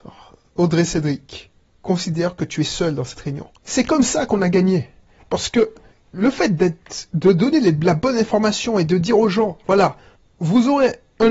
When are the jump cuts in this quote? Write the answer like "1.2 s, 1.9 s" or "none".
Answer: 3.6 s